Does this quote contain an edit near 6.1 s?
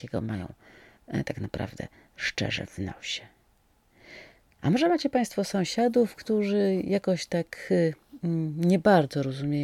no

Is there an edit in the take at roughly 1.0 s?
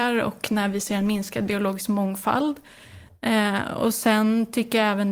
no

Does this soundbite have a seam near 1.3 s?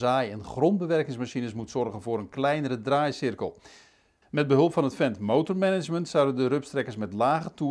no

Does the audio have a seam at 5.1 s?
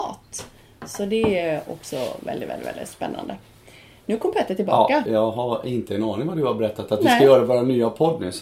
yes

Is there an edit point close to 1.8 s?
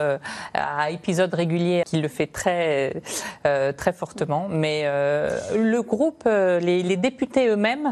yes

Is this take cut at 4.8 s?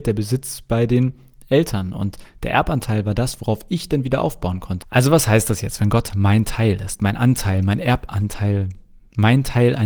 yes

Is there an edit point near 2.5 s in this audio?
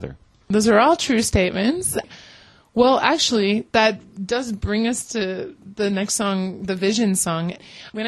no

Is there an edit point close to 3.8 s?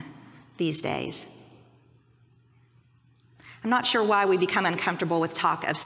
yes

